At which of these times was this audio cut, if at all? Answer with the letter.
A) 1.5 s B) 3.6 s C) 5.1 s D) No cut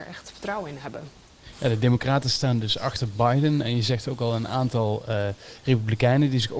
D